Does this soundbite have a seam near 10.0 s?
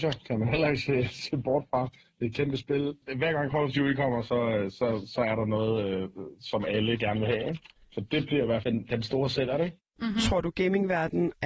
yes; 1 cut; at 10.0 s

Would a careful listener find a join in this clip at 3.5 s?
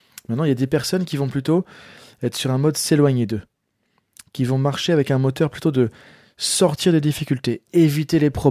no; 0 cuts

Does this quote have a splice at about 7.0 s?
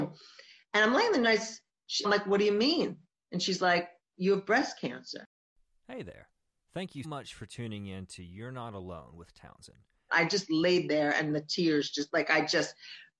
yes; 3 cuts; at 2.0 s, 7.0 s, 10.1 s

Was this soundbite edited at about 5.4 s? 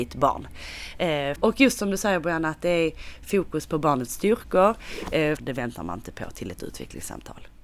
yes; 2 cuts; at 1.4 s, 5.4 s

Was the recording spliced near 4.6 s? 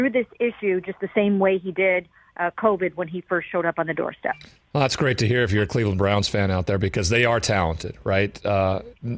no; 0 cuts

